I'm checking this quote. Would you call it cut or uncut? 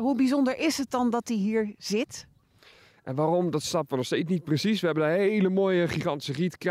cut